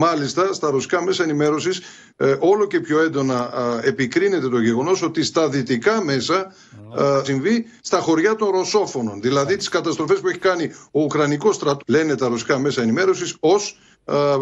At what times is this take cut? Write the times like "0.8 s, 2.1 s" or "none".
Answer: 7.2 s, 11.8 s